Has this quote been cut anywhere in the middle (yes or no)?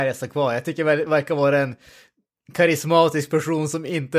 yes